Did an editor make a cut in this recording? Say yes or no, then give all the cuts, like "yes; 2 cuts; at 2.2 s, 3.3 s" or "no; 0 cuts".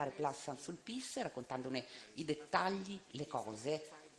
yes; 1 cut; at 3.1 s